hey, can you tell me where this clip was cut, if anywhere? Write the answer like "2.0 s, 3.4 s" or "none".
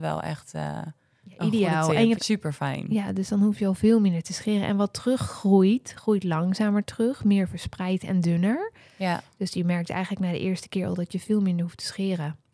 2.2 s